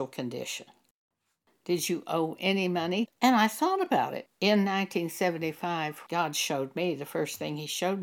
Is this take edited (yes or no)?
yes